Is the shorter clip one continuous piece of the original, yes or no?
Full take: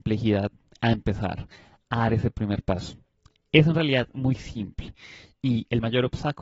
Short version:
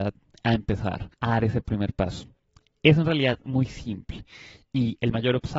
no